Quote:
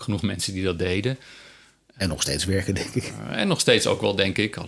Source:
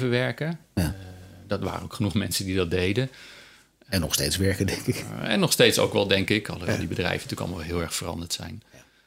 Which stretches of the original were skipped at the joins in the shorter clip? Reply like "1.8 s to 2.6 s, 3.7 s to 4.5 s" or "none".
none